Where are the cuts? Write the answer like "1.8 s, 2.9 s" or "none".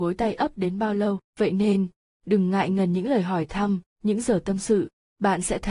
1.3 s, 3.9 s

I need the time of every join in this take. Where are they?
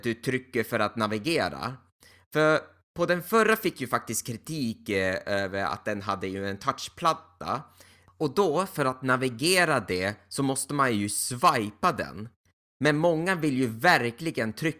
none

